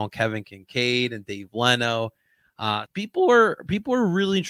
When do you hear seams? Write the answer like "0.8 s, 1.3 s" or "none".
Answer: 2.9 s